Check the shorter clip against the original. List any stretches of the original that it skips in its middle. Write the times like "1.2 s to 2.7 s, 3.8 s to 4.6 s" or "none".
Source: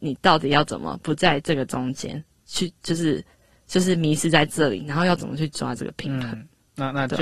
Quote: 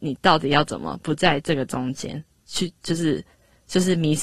none